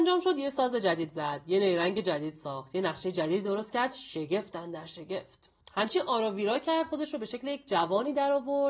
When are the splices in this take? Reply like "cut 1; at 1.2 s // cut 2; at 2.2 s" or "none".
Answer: cut 1; at 5.6 s